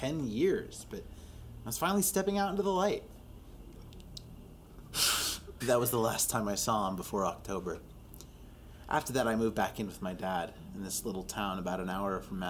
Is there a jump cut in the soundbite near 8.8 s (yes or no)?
no